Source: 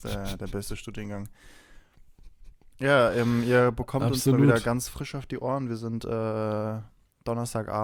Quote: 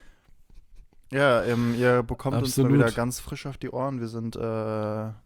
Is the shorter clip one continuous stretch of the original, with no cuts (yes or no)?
yes